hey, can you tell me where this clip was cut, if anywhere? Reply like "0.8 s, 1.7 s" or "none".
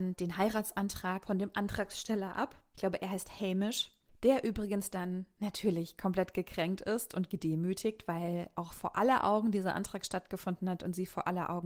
none

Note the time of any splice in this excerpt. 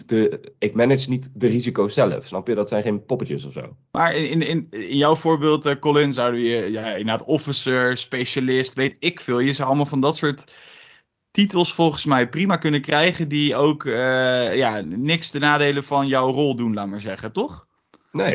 none

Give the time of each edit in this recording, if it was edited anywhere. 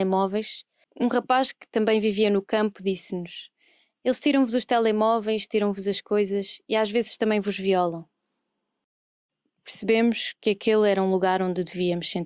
none

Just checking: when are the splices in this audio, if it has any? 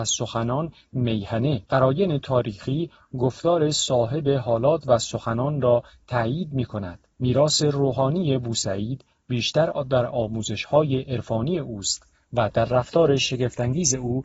1.7 s, 7.1 s

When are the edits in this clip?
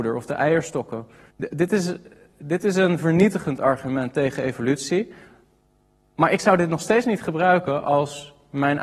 1.3 s

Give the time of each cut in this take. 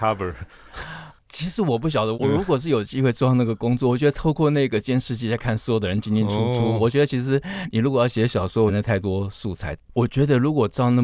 2.1 s, 8.7 s, 9.8 s

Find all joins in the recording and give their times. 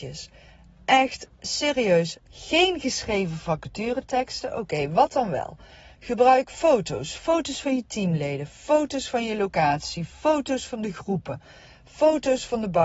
2.2 s

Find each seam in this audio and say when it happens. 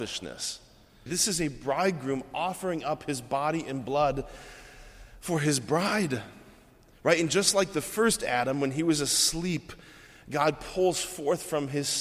1.1 s

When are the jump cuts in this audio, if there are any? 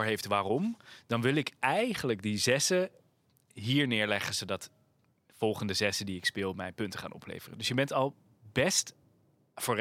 none

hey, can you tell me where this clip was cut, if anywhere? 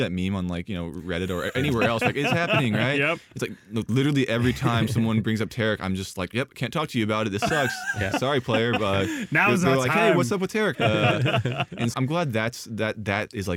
10.7 s, 11.9 s

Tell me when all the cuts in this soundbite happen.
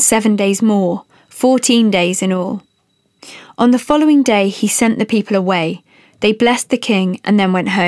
none

